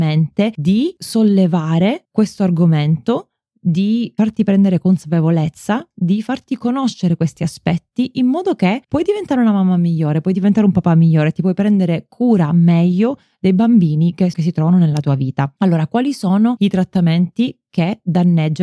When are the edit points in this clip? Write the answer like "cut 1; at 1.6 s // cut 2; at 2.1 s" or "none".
cut 1; at 14.3 s